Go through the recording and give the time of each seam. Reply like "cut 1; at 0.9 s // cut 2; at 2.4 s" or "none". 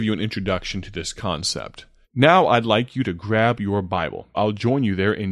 cut 1; at 2.0 s // cut 2; at 4.3 s